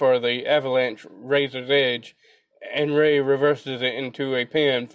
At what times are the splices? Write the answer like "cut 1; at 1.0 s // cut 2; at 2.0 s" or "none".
none